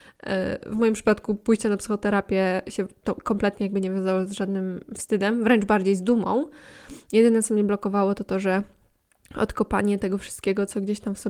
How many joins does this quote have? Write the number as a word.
zero